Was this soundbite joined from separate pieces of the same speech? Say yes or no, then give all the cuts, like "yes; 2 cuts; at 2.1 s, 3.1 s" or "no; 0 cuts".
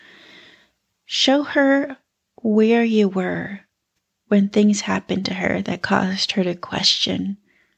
no; 0 cuts